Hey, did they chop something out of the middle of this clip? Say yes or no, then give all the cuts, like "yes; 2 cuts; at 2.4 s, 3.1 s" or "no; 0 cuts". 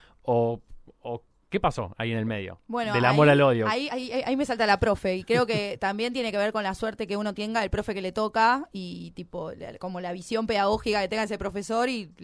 no; 0 cuts